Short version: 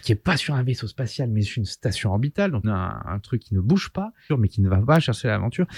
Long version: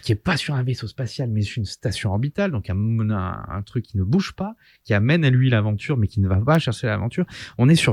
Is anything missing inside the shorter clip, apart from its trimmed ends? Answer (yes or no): yes